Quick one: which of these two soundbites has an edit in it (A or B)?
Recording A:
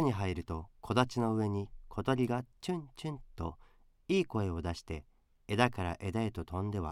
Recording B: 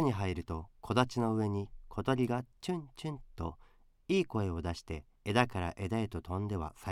B